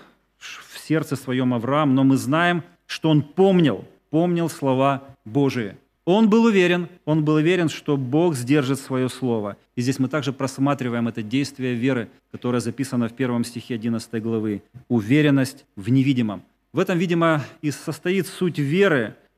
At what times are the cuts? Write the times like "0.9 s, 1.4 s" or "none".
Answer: 6.0 s